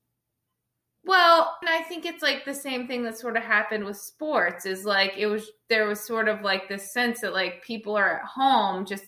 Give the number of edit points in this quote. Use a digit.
1